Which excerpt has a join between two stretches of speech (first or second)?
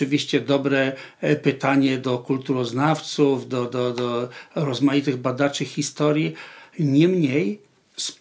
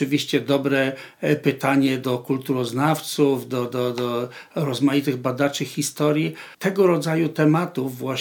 second